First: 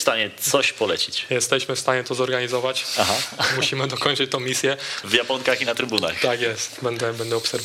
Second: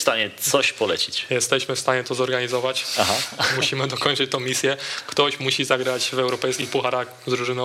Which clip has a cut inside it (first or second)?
first